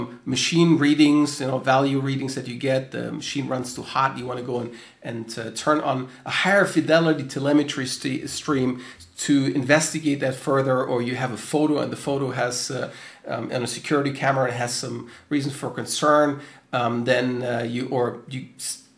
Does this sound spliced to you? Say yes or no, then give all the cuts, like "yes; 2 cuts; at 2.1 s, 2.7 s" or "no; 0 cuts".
no; 0 cuts